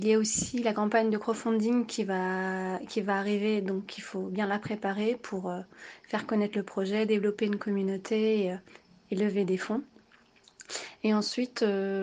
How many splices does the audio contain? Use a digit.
0